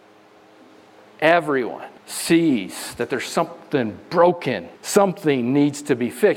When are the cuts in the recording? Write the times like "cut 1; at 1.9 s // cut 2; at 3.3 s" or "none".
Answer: cut 1; at 2.0 s // cut 2; at 4.7 s